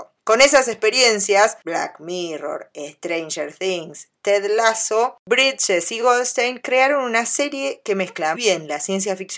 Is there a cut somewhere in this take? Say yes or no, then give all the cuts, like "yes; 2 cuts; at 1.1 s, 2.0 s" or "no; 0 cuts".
yes; 1 cut; at 8.3 s